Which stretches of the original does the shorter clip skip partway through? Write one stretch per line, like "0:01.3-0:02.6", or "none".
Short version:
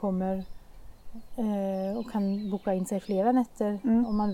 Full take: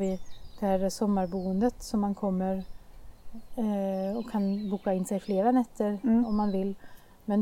none